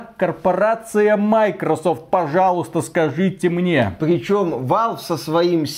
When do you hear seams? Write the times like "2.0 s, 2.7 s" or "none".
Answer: none